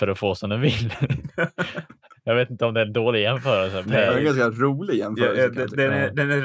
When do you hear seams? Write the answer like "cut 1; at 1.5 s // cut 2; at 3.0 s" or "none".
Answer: cut 1; at 3.8 s

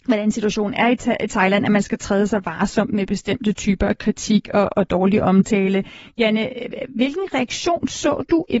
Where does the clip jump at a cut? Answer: none

